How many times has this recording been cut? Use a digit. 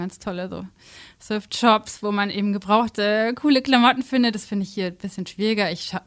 0